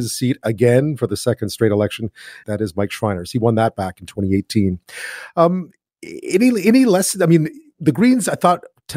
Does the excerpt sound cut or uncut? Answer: cut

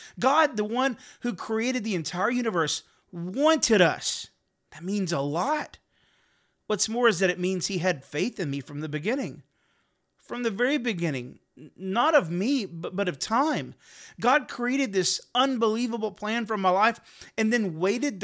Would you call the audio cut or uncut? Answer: uncut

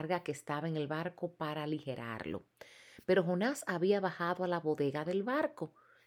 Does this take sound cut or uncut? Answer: uncut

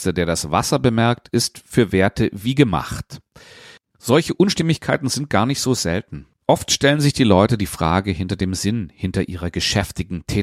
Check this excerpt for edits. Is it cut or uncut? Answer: cut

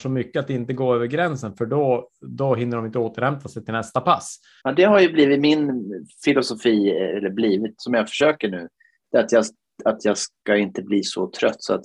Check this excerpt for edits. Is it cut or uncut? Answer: cut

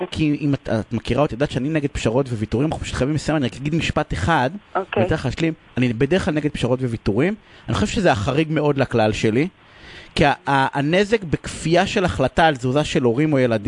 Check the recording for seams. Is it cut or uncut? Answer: uncut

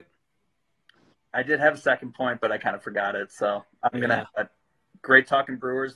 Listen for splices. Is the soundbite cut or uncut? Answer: cut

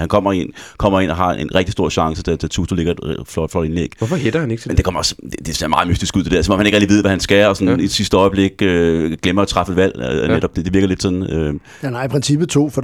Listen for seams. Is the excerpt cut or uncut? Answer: uncut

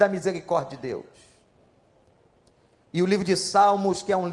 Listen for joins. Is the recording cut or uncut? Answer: uncut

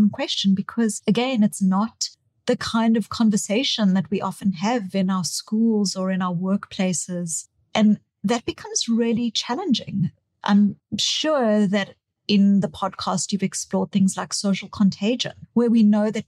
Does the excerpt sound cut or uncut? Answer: uncut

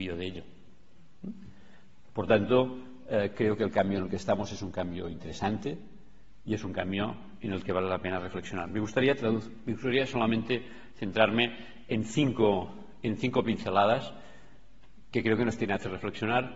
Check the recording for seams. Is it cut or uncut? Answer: uncut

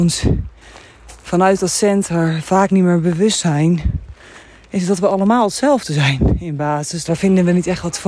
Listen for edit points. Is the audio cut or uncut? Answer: cut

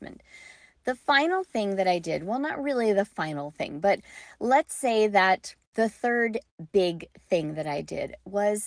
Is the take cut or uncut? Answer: cut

